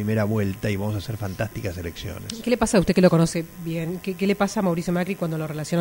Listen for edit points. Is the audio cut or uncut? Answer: uncut